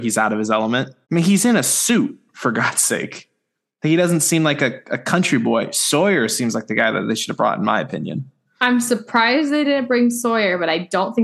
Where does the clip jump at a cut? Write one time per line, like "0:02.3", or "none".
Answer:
0:01.0